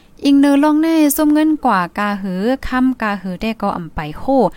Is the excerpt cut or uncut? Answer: uncut